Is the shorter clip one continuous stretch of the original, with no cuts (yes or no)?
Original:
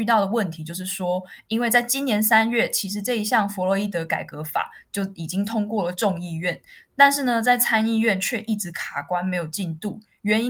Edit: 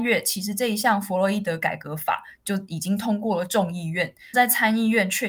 no